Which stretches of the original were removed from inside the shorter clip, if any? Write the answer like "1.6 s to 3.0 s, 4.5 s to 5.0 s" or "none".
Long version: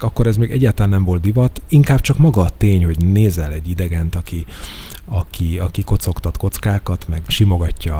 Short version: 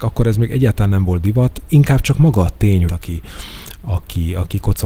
2.9 s to 4.1 s